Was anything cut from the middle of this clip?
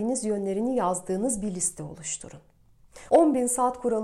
yes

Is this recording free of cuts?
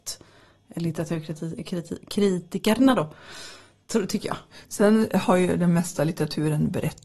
yes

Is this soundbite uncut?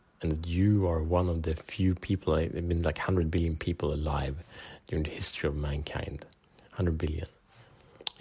yes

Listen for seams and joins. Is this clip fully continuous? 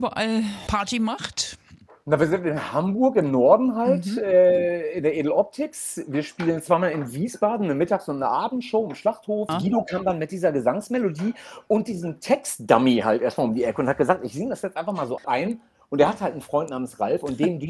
no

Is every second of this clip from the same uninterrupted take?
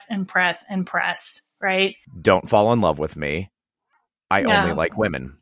no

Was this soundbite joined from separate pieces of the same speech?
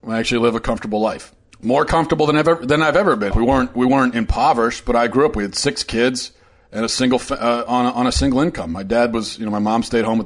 yes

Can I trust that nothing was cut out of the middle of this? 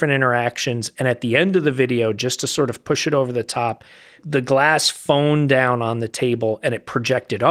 no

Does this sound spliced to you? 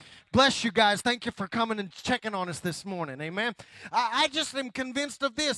no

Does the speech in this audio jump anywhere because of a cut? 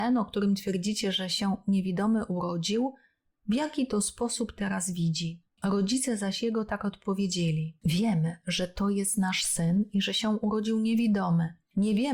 no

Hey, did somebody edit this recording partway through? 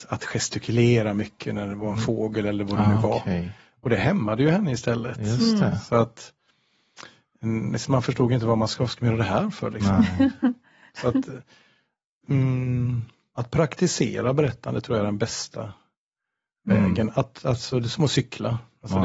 yes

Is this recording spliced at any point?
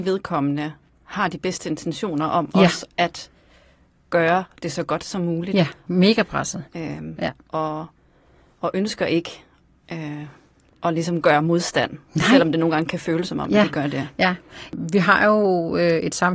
yes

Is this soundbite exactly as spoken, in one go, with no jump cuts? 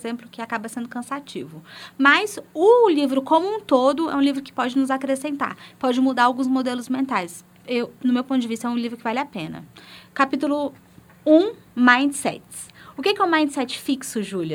yes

